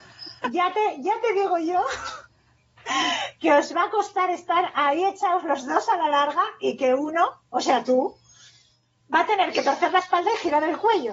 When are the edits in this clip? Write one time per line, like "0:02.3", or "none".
none